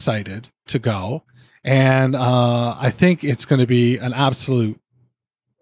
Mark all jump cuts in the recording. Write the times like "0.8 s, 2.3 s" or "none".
none